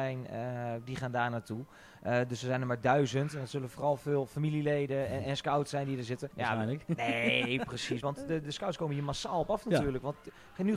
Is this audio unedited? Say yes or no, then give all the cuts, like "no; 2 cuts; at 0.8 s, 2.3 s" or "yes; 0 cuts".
no; 2 cuts; at 6.3 s, 8.0 s